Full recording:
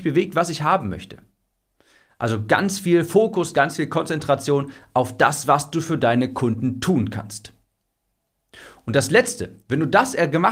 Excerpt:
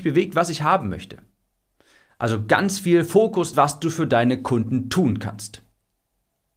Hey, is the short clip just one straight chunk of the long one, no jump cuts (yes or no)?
no